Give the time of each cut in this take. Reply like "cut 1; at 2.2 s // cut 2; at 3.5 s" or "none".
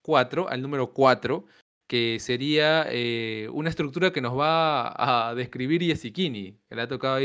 none